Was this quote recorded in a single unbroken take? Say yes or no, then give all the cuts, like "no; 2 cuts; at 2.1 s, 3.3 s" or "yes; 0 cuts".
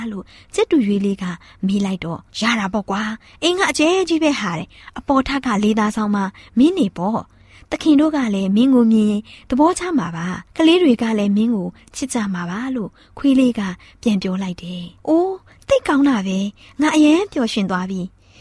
no; 3 cuts; at 2.3 s, 10.5 s, 15.0 s